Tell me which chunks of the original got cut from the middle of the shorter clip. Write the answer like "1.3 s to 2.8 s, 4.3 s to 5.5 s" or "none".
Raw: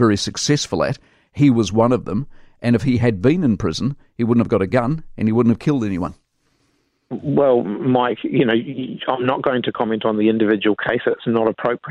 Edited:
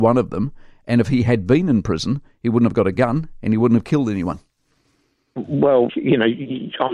7.6 s to 8.2 s